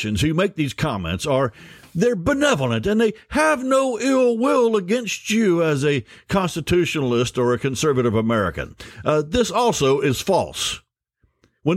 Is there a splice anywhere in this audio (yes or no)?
no